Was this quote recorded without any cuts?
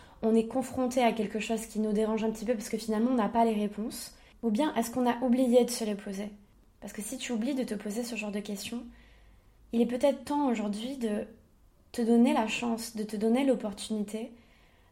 yes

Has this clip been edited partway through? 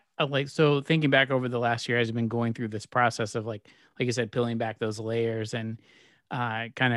no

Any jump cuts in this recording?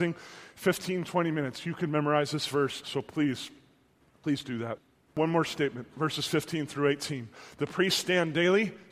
yes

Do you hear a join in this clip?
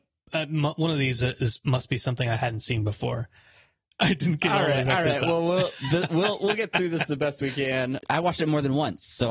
yes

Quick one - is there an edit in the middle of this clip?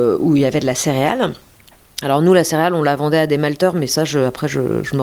no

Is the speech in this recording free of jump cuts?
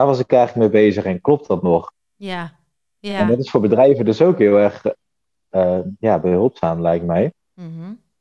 yes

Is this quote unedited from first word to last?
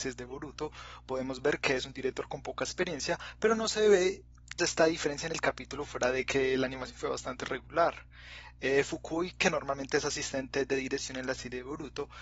no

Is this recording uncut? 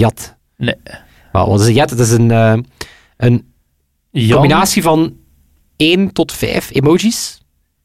yes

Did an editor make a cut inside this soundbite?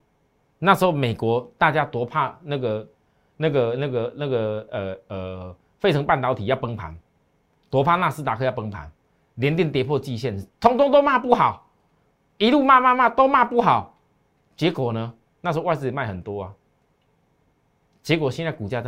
no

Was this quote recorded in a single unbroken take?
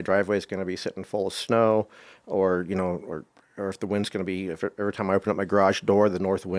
yes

